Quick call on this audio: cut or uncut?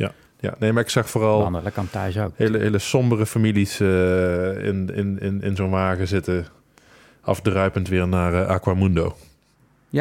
uncut